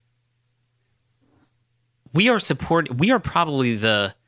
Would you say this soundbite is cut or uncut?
uncut